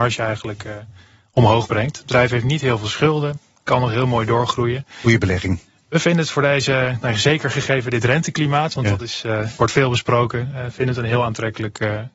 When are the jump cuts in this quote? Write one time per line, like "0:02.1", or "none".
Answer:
none